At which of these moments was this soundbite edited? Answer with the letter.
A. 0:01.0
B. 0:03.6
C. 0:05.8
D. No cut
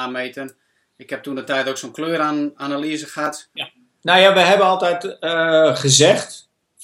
B